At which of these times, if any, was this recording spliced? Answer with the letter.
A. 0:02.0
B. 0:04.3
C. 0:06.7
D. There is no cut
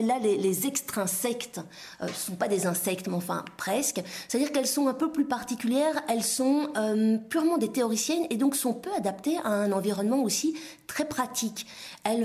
D